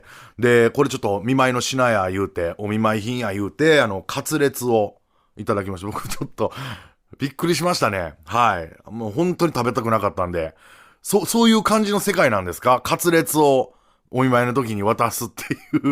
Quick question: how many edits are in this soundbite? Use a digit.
0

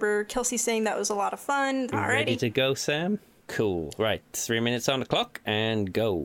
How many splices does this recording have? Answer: 2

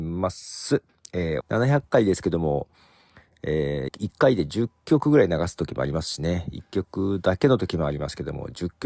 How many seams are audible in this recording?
2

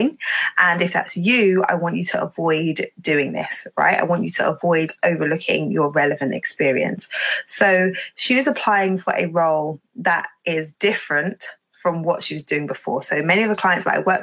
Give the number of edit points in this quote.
0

